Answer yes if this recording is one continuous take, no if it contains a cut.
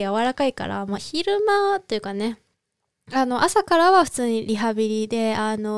no